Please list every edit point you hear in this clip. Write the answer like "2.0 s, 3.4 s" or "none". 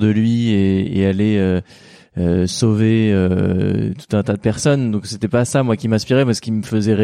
none